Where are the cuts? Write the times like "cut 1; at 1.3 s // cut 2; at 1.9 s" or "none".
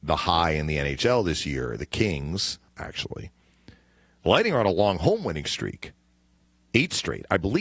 cut 1; at 2.7 s